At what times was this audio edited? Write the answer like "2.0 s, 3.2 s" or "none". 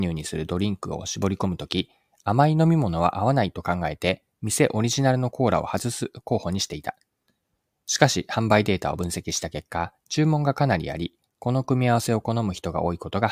none